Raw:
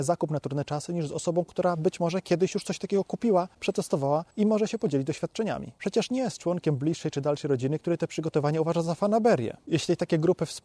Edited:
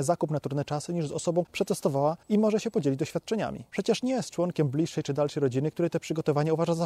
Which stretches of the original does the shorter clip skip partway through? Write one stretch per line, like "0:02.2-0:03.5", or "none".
0:01.4-0:03.5